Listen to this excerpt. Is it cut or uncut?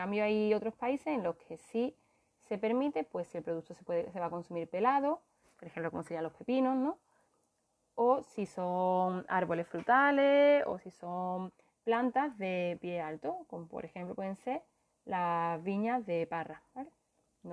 uncut